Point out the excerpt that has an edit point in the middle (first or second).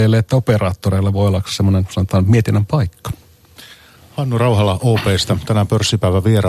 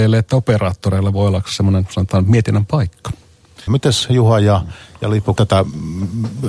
second